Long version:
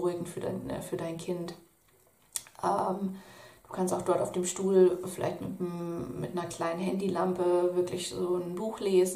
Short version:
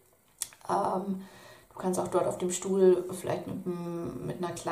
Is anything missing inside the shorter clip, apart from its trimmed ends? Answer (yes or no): no